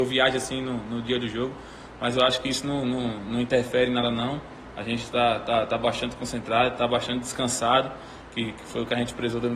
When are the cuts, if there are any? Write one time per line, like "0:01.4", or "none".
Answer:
none